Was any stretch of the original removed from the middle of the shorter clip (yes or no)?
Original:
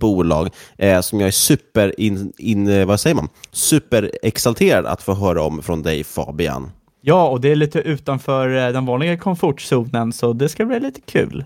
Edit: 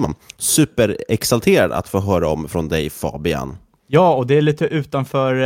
no